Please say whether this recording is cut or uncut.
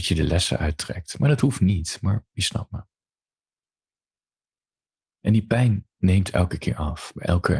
uncut